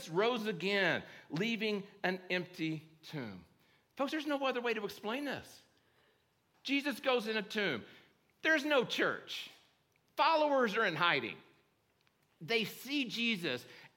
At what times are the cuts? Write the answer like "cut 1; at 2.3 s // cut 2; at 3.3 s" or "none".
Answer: cut 1; at 6.5 s